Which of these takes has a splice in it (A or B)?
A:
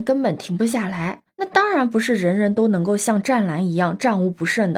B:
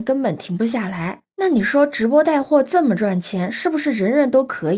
A